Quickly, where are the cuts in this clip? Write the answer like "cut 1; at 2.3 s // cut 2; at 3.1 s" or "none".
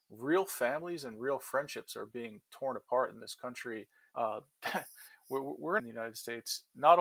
cut 1; at 4.1 s // cut 2; at 5.8 s